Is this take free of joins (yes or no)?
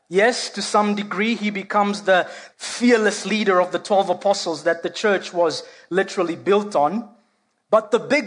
no